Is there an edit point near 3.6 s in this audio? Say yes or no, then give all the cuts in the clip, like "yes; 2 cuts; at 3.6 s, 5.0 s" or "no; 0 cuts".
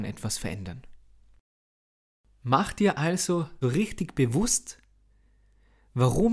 yes; 1 cut; at 3.6 s